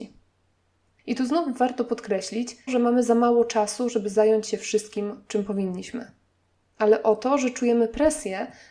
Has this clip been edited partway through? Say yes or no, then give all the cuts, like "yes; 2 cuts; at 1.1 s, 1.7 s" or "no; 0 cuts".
yes; 1 cut; at 2.7 s